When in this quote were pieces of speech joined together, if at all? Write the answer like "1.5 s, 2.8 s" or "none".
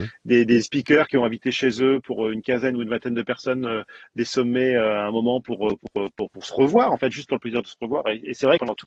none